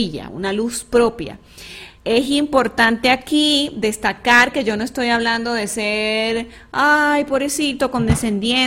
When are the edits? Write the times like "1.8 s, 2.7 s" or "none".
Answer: 2.0 s